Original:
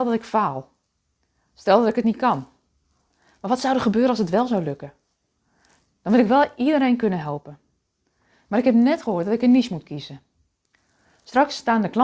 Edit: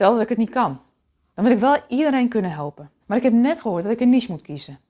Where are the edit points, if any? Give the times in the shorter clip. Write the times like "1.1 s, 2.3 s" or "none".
1.3 s, 3.0 s